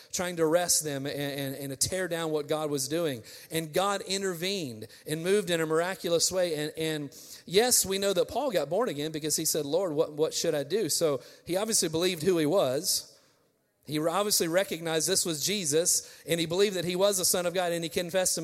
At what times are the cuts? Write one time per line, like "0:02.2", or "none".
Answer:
none